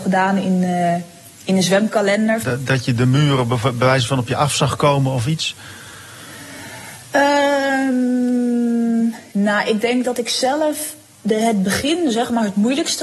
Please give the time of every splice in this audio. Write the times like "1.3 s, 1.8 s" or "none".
2.4 s